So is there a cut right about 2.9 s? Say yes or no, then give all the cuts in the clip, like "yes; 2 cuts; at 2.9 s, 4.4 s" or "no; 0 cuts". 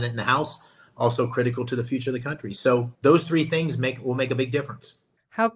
yes; 1 cut; at 2.9 s